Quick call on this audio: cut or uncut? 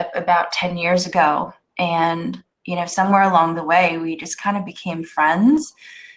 uncut